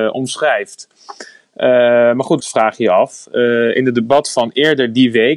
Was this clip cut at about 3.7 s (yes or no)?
no